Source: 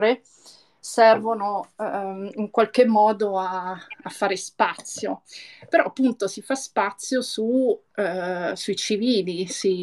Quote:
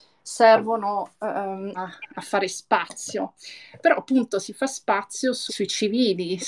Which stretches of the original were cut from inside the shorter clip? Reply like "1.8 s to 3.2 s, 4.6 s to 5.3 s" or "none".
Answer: 2.3 s to 3.6 s, 7.4 s to 8.6 s